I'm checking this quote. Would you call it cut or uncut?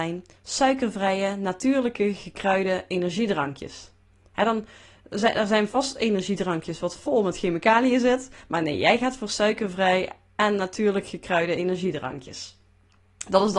uncut